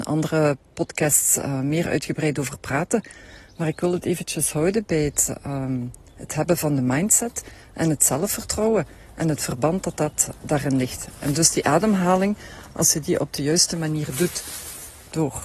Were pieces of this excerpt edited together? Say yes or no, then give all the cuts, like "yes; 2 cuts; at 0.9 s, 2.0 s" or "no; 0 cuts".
no; 0 cuts